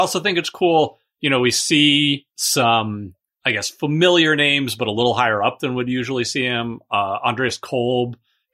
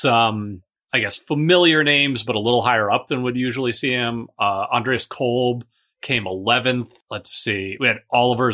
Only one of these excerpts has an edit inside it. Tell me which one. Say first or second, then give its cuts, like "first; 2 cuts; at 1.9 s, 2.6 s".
second; 1 cut; at 7.0 s